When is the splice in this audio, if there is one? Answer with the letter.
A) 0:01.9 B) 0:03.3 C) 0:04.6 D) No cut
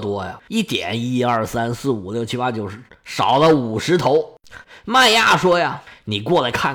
C